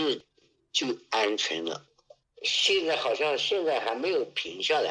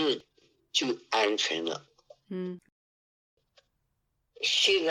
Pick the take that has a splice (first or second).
first